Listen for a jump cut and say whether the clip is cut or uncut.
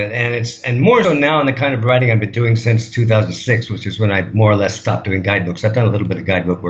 cut